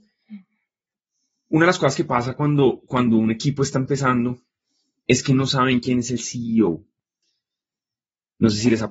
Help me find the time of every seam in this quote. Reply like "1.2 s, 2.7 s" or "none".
none